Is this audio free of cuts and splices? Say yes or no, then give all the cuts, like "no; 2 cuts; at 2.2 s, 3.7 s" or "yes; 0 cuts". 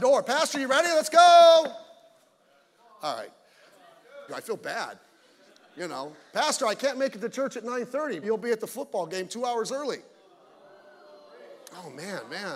no; 2 cuts; at 4.3 s, 8.2 s